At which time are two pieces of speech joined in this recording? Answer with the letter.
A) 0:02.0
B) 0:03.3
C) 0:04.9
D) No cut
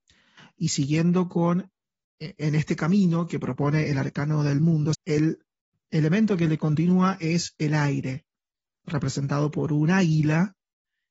C